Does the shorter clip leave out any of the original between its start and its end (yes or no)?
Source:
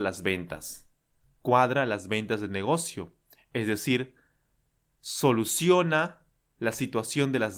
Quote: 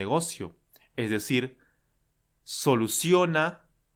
no